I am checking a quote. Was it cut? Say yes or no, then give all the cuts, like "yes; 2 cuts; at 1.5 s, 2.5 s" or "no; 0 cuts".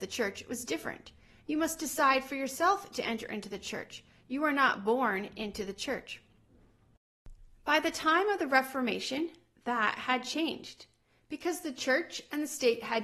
no; 0 cuts